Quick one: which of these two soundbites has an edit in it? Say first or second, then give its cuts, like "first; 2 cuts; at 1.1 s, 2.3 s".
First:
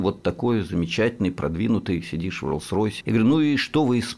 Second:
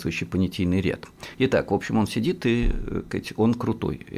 first; 1 cut; at 3.0 s